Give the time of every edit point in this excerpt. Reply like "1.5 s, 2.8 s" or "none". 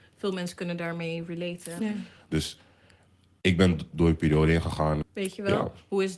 1.8 s, 5.0 s

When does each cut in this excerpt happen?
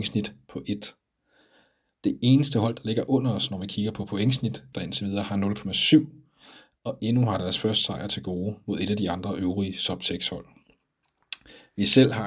1.9 s, 4.7 s

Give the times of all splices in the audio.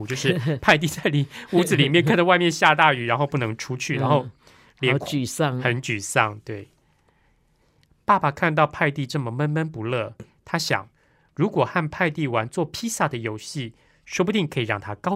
none

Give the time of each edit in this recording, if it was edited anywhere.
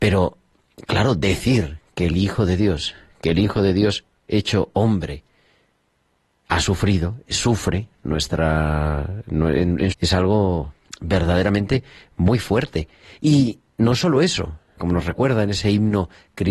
9.9 s, 14.8 s

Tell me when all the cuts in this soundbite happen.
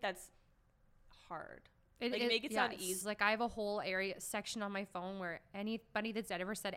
3.0 s

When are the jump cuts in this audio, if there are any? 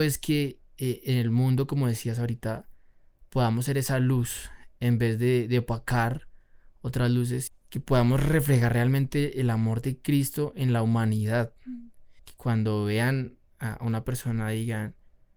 7.5 s, 12.2 s

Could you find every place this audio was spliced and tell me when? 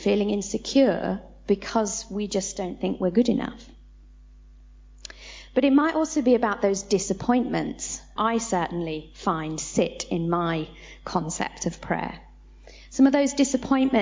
8.2 s

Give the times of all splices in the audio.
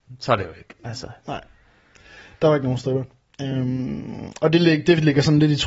none

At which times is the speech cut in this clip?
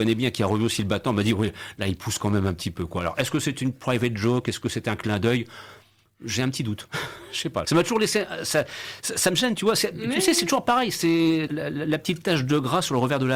7.6 s, 11.5 s

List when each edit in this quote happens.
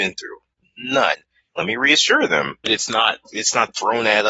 1.5 s, 2.6 s

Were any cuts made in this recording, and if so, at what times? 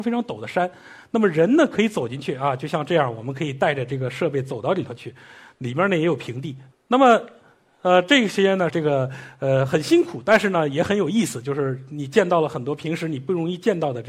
6.7 s, 8.7 s

